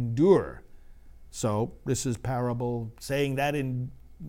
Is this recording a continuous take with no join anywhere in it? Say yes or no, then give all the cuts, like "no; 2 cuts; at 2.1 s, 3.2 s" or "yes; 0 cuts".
yes; 0 cuts